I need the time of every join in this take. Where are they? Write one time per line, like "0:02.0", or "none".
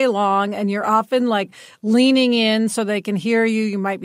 none